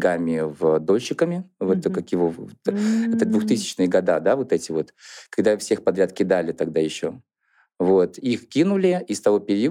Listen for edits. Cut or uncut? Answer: uncut